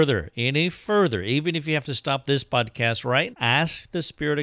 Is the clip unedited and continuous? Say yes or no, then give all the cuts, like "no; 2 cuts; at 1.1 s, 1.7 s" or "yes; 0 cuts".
no; 1 cut; at 3.3 s